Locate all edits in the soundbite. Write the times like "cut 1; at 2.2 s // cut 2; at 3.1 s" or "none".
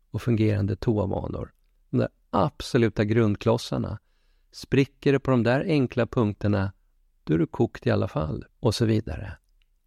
cut 1; at 8.5 s